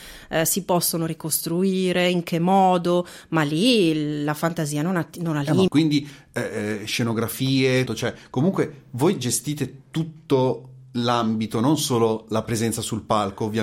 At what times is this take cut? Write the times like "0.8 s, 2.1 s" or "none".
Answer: 5.7 s, 7.9 s, 12.5 s